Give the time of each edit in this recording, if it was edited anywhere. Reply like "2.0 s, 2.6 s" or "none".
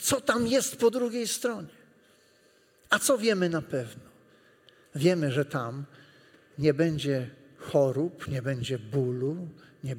none